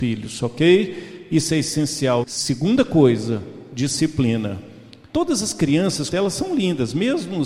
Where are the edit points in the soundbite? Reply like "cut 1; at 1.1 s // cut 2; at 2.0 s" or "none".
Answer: cut 1; at 2.2 s // cut 2; at 5.1 s // cut 3; at 6.1 s